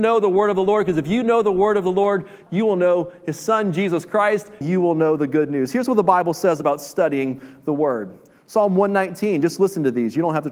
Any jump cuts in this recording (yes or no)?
yes